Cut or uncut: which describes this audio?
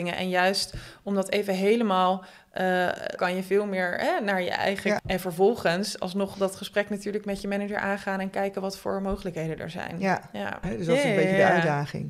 cut